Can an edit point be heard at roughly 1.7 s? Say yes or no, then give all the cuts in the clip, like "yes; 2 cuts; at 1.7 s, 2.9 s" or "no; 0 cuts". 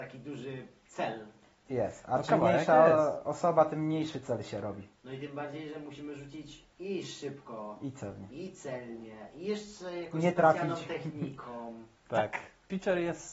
yes; 1 cut; at 1.7 s